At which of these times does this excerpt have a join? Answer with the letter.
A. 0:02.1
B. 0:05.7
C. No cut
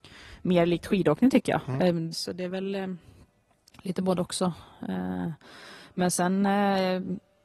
A